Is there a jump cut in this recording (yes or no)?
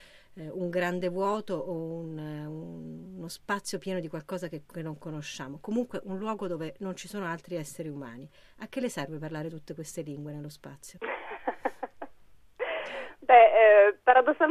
no